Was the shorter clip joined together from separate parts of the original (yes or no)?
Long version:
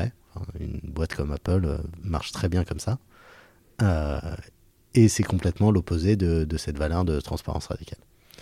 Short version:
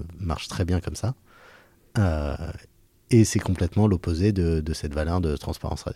no